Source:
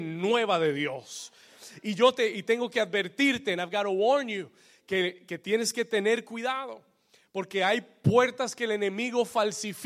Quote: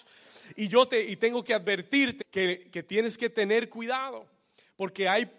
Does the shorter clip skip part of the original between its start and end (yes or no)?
yes